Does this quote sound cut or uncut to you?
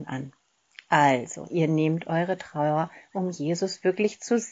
uncut